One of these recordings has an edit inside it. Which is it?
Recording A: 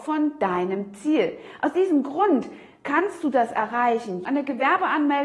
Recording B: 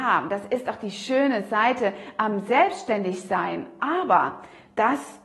A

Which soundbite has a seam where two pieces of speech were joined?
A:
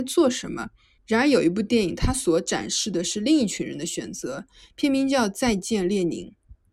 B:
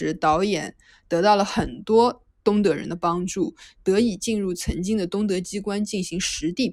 A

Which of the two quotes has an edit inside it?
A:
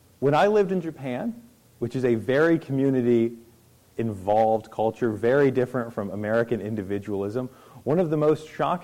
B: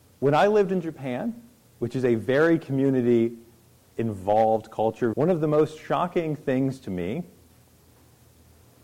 B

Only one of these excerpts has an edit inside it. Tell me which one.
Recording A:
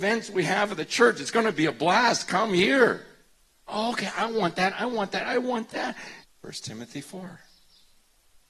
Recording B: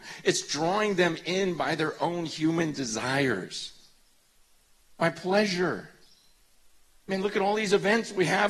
A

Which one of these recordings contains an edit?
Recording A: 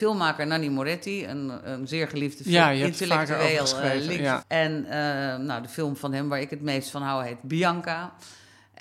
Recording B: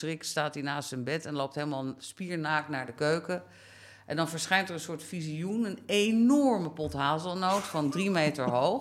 A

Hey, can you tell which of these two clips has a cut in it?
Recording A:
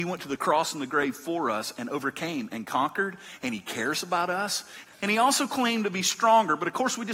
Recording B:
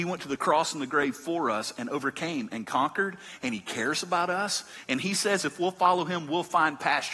A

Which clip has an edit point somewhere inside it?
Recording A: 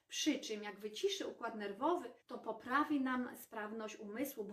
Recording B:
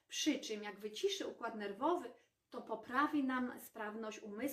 A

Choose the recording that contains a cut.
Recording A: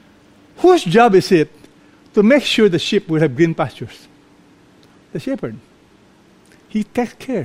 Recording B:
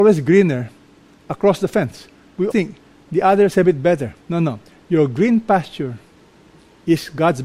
B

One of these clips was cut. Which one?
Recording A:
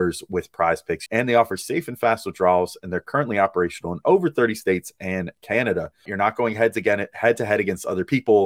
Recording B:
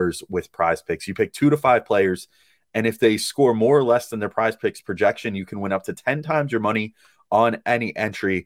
A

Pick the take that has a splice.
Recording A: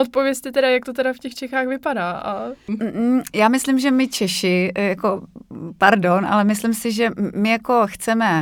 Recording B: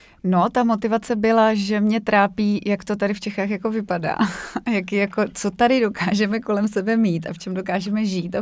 A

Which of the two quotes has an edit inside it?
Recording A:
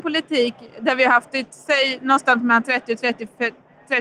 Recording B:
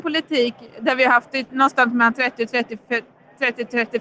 B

